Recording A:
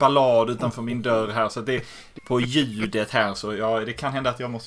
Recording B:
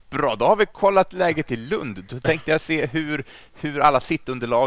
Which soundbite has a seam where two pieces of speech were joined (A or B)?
A